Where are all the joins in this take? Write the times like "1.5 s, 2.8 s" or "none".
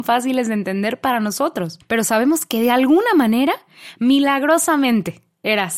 none